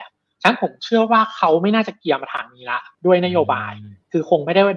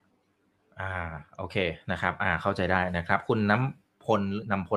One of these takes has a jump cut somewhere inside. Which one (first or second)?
first